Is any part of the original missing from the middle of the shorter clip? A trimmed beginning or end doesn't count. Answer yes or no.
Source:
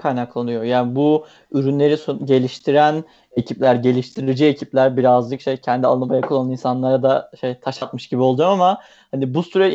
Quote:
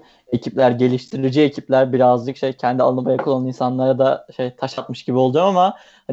no